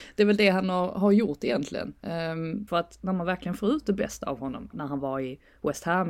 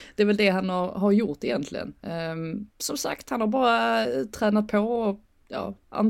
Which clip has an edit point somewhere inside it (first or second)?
first